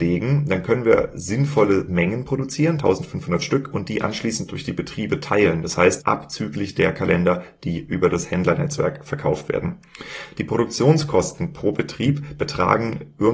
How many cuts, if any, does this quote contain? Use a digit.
1